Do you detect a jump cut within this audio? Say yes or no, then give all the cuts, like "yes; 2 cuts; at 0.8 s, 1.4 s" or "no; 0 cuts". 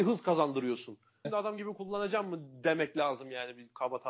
yes; 1 cut; at 1.2 s